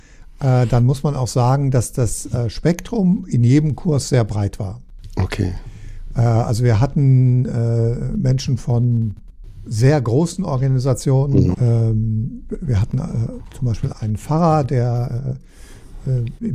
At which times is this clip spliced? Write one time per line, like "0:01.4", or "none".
0:11.5
0:13.9